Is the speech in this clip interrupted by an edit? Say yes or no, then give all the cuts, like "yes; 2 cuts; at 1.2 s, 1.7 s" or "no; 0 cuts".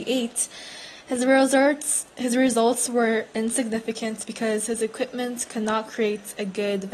no; 0 cuts